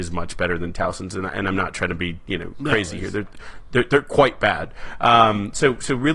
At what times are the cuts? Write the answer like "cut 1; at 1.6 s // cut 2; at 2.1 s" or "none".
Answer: none

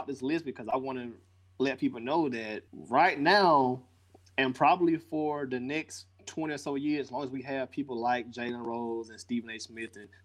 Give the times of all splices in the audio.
cut 1; at 2.7 s

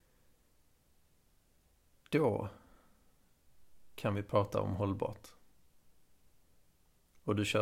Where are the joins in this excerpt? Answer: none

